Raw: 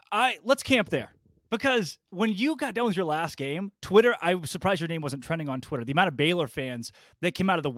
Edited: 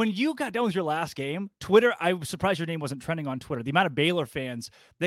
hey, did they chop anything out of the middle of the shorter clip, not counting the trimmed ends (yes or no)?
no